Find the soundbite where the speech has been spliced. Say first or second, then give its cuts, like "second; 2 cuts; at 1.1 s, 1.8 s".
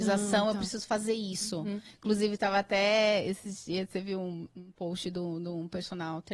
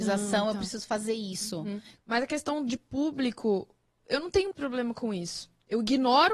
second; 2 cuts; at 2.0 s, 4.5 s